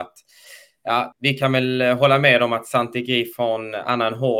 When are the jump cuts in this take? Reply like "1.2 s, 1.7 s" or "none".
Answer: 1.1 s